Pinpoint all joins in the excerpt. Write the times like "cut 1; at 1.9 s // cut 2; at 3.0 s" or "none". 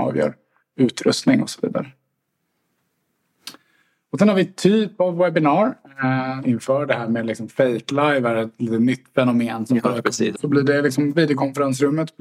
cut 1; at 6.4 s // cut 2; at 10.3 s